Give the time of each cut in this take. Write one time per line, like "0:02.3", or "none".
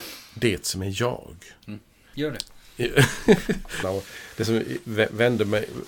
0:02.1
0:03.8